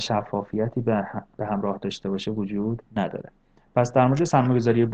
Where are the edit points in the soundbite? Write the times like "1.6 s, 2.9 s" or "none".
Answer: 1.4 s, 2.9 s